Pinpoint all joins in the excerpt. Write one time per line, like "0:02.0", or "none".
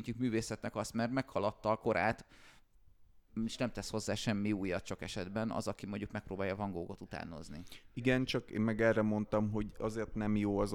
none